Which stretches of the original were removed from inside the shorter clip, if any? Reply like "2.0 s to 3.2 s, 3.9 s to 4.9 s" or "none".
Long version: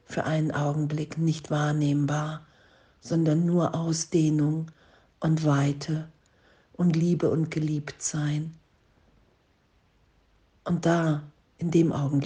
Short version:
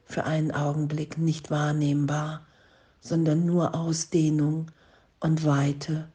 none